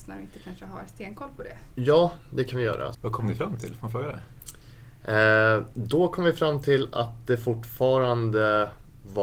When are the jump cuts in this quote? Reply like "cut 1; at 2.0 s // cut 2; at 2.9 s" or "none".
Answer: cut 1; at 2.9 s